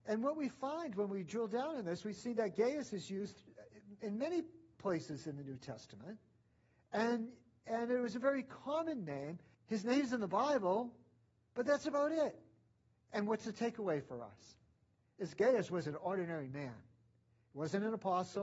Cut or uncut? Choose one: cut